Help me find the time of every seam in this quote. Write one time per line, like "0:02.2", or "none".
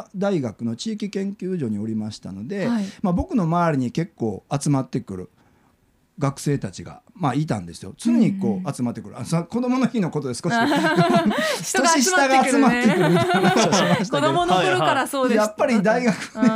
none